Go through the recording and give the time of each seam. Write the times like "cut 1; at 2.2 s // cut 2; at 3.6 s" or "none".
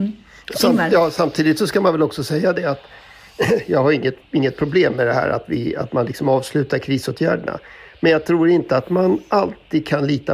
none

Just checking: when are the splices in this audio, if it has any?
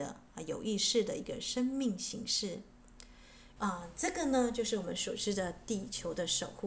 cut 1; at 3.6 s

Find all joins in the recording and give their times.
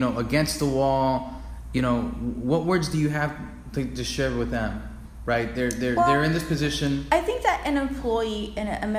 none

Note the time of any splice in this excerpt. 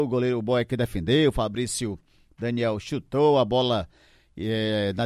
none

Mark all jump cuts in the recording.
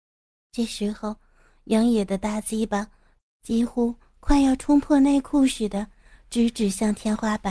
none

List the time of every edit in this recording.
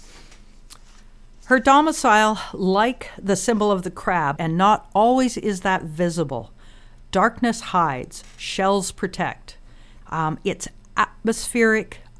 cut 1; at 4.4 s // cut 2; at 10.0 s

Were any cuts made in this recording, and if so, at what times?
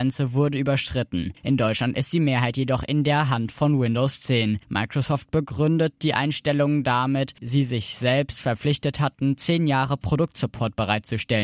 cut 1; at 1.4 s // cut 2; at 7.4 s

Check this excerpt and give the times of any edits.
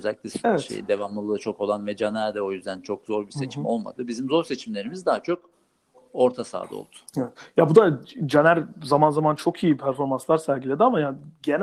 none

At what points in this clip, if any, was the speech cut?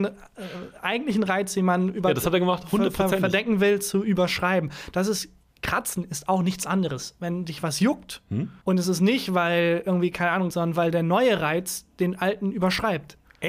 cut 1; at 8.6 s // cut 2; at 10.5 s

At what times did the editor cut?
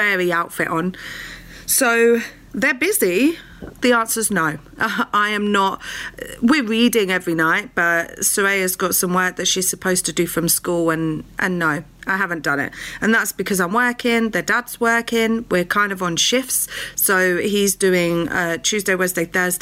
cut 1; at 3.8 s

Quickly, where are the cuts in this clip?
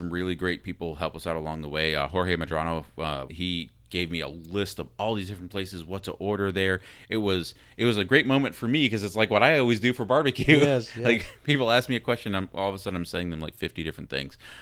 cut 1; at 3.3 s

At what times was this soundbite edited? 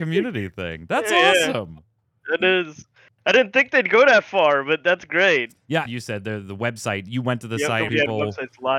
cut 1; at 5.9 s // cut 2; at 7.9 s

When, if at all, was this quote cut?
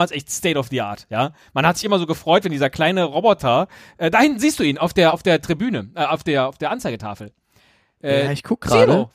none

